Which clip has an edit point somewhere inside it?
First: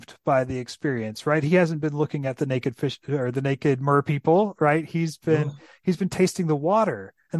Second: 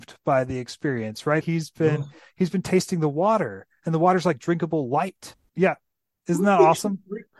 second; 2 cuts; at 1.4 s, 5.5 s

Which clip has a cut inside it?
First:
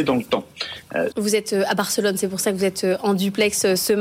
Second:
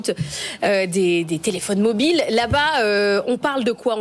first; 1 cut; at 1.1 s

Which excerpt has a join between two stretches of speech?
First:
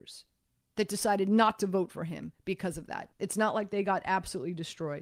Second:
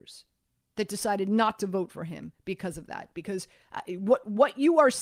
first; 1 cut; at 3.1 s

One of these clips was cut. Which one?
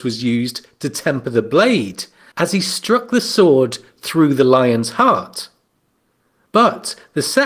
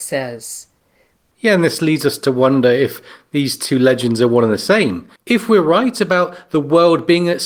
second; 2 cuts; at 1.2 s, 5.2 s

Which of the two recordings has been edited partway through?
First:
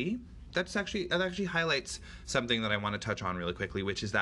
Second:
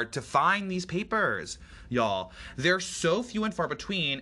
first; 1 cut; at 1.1 s

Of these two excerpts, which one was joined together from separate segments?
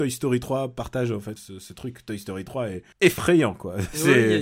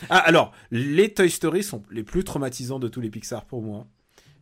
first; 2 cuts; at 1.4 s, 2.9 s

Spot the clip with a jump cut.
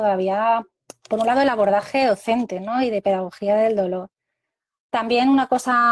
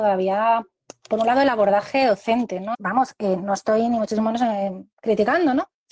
second; 1 cut; at 2.7 s

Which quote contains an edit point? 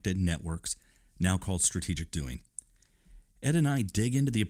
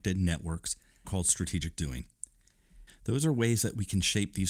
second; 2 cuts; at 1.0 s, 2.9 s

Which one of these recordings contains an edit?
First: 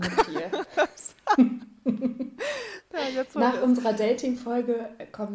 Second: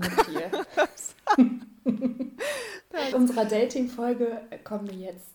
second; 1 cut; at 3.1 s

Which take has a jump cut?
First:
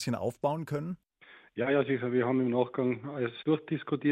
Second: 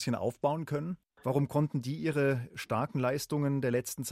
second; 1 cut; at 1.2 s

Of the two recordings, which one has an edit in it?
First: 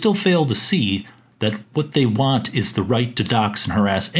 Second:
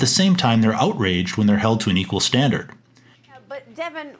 second; 1 cut; at 3.2 s

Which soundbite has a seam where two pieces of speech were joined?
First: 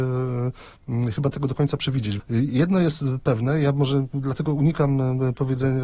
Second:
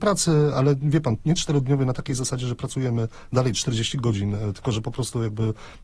first; 1 cut; at 2.2 s

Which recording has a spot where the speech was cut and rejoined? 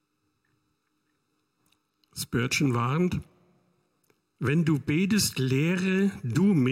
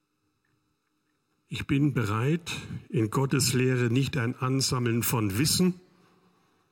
second; 1 cut; at 1.3 s

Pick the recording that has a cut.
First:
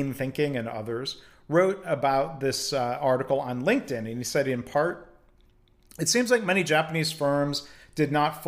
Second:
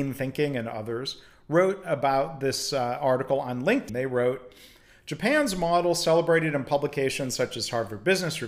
second; 1 cut; at 3.9 s

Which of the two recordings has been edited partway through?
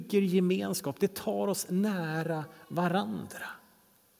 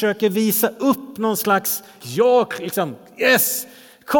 second; 1 cut; at 2.0 s

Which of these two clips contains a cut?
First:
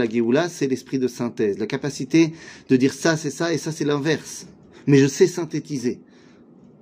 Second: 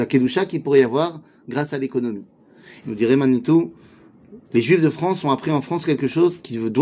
second; 1 cut; at 2.8 s

